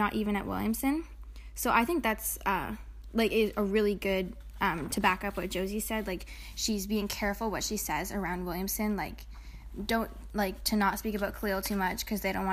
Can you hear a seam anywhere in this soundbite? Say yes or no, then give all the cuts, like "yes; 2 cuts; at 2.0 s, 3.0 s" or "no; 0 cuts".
no; 0 cuts